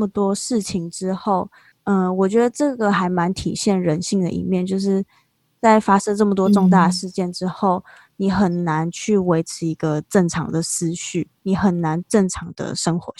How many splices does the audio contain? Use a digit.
0